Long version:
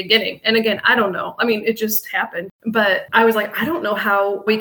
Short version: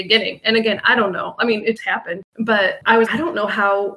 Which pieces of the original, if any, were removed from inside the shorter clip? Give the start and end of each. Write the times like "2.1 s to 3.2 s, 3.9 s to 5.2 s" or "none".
1.8 s to 2.0 s, 3.3 s to 3.5 s